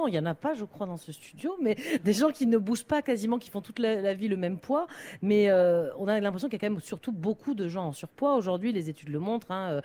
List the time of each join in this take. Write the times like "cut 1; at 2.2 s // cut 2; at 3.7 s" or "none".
none